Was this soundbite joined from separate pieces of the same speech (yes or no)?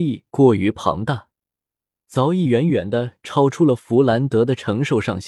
no